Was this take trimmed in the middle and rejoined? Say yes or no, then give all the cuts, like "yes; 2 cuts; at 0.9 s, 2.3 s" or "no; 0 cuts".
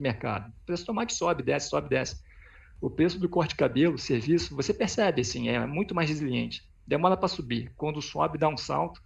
no; 0 cuts